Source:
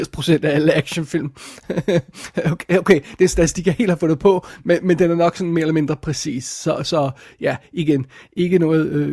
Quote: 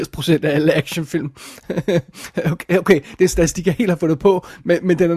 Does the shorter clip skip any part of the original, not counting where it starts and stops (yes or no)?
no